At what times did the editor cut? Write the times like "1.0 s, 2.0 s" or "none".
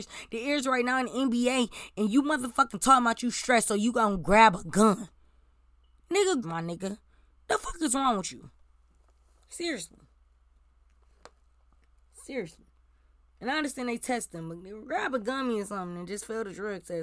6.4 s

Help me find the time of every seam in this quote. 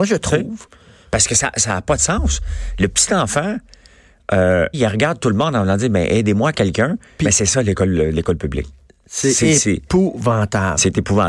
4.7 s, 7.2 s

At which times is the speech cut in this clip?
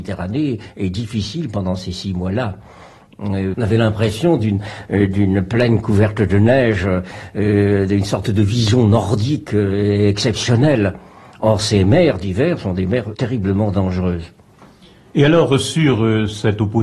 3.5 s

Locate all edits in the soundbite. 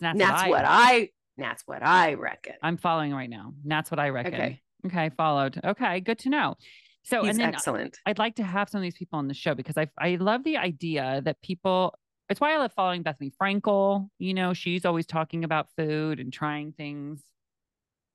none

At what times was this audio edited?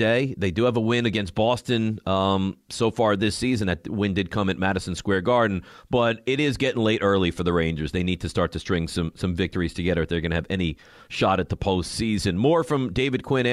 none

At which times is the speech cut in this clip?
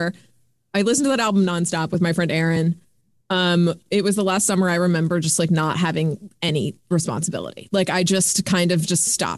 none

